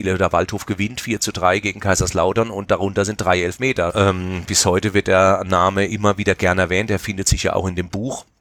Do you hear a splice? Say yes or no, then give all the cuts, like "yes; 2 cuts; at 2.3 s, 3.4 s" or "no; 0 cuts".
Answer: yes; 1 cut; at 3.9 s